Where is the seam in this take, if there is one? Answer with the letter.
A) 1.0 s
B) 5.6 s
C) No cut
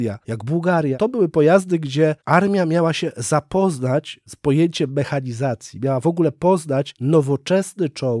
C